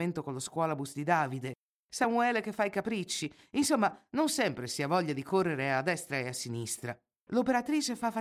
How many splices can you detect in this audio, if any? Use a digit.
1